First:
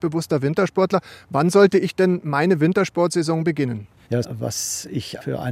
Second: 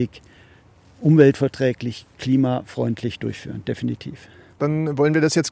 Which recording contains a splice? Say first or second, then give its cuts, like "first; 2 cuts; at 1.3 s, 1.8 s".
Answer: first; 1 cut; at 4.2 s